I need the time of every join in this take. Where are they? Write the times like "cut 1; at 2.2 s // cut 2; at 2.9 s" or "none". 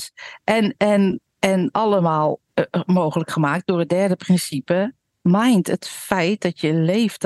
cut 1; at 2.5 s